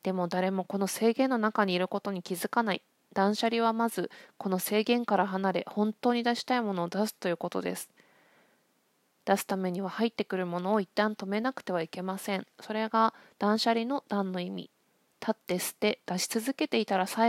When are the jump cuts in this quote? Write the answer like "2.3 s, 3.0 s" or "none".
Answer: none